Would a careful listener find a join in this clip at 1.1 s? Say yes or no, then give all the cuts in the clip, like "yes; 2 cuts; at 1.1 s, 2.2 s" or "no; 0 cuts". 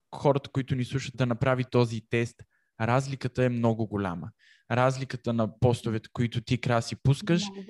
yes; 1 cut; at 1.1 s